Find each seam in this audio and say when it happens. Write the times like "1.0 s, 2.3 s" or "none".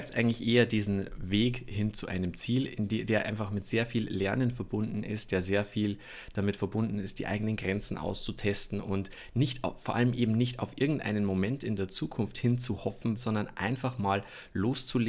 13.2 s